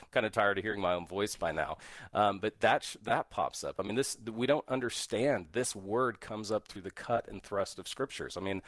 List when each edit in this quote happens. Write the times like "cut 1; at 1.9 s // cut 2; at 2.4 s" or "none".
none